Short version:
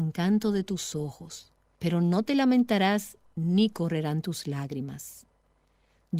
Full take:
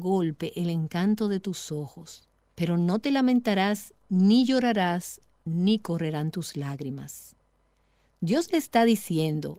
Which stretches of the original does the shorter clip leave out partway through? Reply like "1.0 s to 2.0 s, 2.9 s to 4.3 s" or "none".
4.0 s to 5.3 s